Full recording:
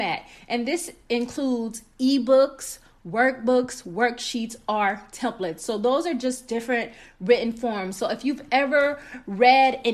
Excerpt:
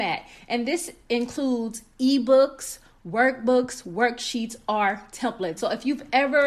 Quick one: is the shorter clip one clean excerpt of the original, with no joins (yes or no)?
no